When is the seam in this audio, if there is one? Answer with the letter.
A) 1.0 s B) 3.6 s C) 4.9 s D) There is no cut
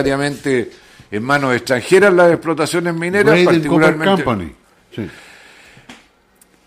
C